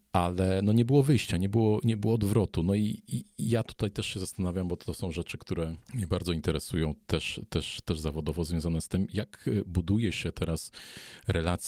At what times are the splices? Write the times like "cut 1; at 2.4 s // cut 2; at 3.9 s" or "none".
cut 1; at 5.8 s